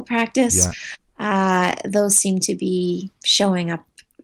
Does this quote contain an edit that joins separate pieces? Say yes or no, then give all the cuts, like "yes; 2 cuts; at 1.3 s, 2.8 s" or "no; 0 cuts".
yes; 1 cut; at 3.1 s